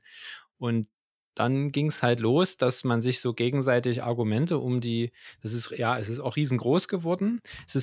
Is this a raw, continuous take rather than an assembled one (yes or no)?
yes